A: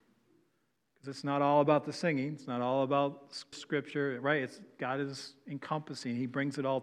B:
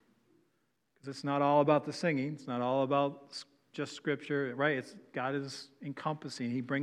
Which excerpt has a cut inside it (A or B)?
A